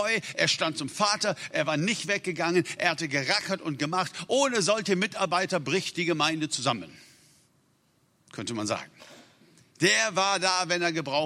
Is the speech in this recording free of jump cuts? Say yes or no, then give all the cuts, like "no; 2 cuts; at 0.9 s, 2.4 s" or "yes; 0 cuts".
yes; 0 cuts